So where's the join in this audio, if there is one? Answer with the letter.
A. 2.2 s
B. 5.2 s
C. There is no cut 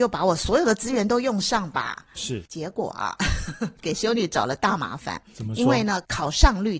A